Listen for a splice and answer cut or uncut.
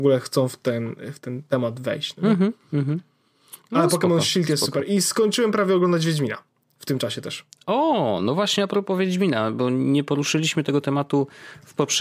uncut